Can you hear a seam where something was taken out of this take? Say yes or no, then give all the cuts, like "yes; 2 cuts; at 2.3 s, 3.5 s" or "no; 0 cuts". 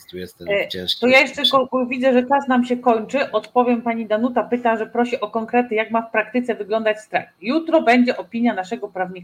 no; 0 cuts